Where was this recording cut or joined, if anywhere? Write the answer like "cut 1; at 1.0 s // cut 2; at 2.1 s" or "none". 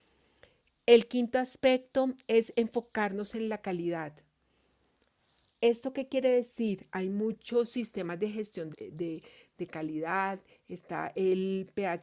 cut 1; at 8.7 s

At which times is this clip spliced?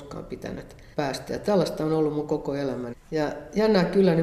cut 1; at 0.9 s // cut 2; at 2.9 s

